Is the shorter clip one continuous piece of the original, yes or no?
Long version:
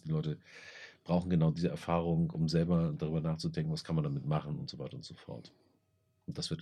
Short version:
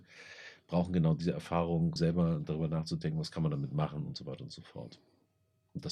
no